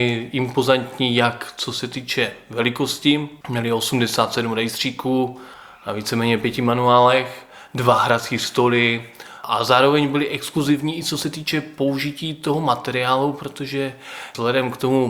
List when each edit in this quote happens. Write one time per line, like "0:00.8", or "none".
0:03.4